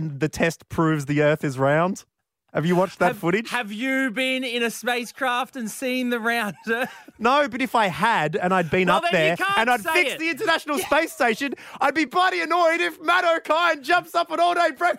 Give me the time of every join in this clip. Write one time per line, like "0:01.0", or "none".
0:12.1